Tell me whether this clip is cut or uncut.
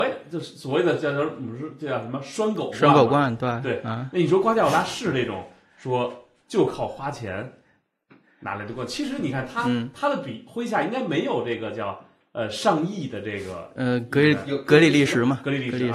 uncut